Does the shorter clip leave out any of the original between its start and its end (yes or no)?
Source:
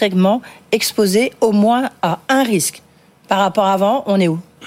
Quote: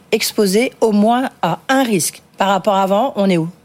yes